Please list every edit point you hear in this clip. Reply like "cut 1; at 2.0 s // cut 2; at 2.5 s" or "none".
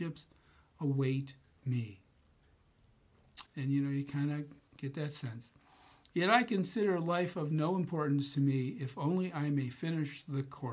cut 1; at 3.5 s